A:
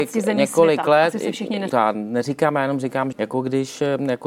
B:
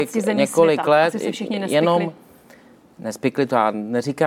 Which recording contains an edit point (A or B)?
A